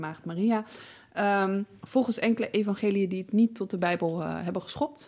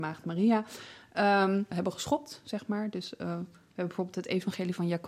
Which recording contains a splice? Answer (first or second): second